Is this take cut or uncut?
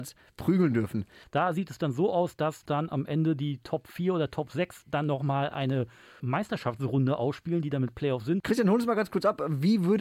cut